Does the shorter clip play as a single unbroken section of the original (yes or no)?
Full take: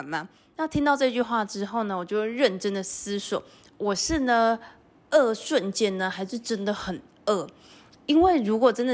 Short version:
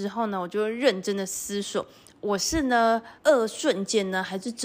no